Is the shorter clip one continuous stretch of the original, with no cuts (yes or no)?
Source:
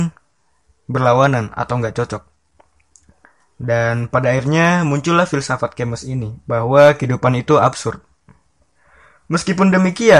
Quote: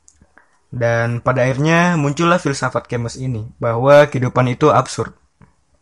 yes